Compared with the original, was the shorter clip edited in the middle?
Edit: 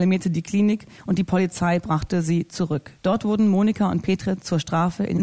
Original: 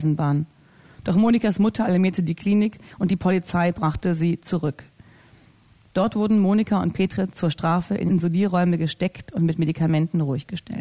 yes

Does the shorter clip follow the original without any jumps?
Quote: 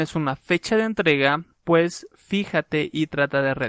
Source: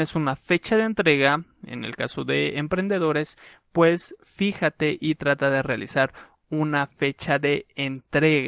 no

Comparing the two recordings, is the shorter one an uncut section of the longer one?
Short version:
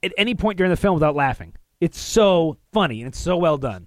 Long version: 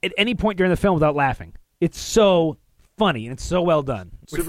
no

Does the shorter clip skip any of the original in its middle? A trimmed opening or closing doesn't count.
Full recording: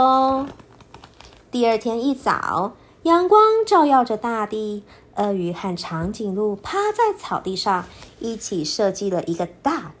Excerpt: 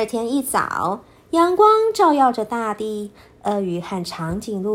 no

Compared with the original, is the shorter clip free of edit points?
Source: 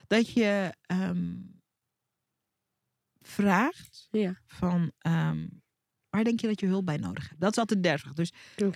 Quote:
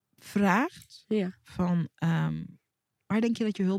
yes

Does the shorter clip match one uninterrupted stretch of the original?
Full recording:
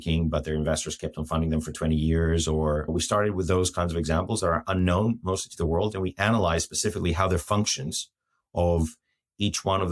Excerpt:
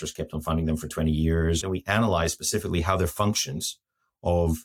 no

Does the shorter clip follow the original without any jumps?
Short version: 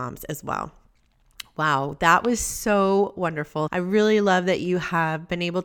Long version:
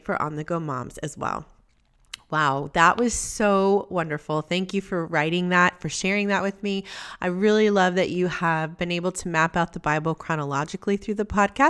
no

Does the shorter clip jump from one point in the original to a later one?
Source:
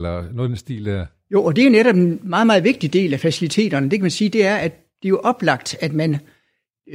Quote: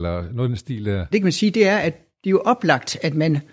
yes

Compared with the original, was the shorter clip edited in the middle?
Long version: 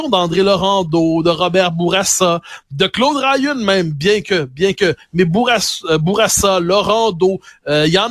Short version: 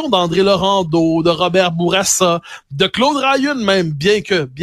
no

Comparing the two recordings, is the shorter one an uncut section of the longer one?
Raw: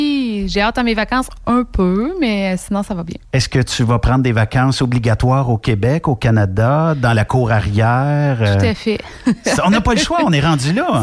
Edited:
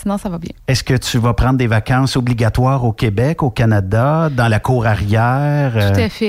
yes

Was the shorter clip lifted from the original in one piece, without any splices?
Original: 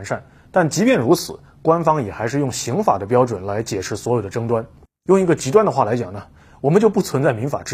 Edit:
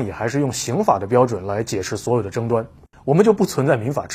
no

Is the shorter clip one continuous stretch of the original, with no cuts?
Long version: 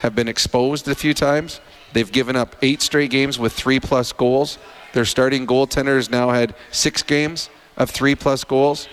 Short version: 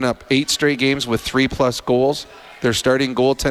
yes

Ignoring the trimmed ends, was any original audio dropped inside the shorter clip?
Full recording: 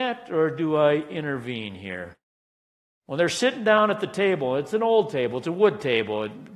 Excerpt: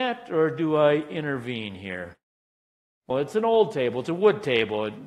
yes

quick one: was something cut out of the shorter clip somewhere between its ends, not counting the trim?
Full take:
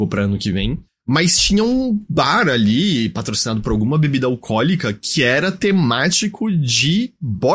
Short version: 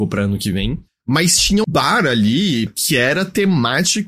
yes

